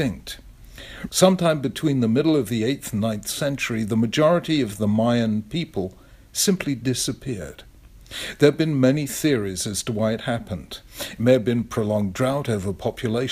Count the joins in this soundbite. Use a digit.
1